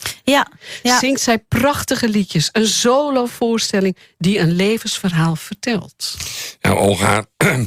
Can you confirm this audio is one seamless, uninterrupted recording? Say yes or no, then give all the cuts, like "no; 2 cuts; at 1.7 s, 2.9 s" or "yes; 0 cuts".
yes; 0 cuts